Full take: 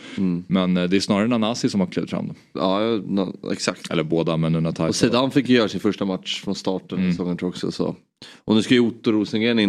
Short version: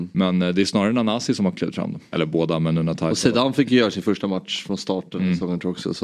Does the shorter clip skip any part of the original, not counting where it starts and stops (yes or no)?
yes